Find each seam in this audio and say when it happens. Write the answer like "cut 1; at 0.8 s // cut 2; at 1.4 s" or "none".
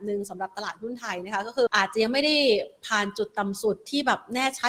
cut 1; at 1.7 s